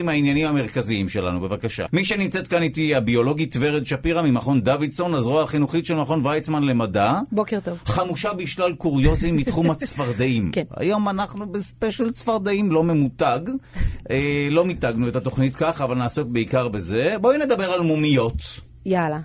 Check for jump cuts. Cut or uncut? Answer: uncut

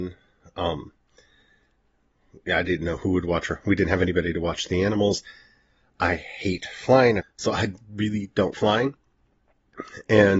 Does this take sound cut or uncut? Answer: cut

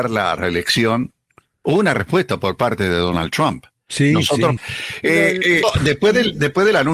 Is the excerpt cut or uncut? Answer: cut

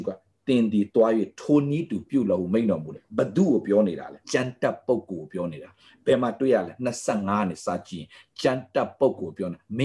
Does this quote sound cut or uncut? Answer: cut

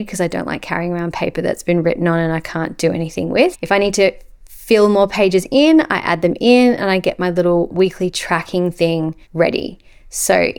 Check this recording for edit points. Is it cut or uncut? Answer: cut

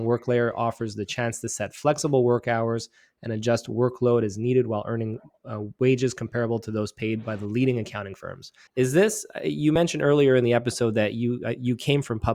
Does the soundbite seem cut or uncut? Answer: cut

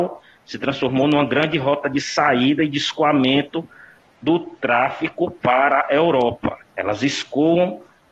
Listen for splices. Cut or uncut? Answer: cut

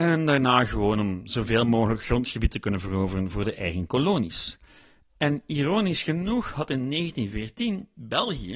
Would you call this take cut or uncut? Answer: uncut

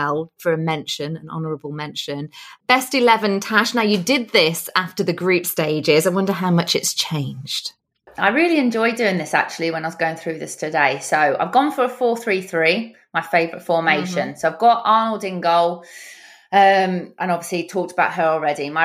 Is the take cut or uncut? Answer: uncut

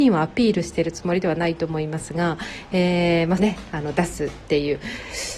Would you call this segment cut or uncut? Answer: cut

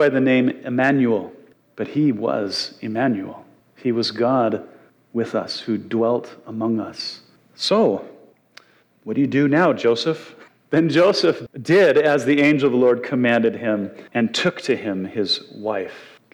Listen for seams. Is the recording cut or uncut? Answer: cut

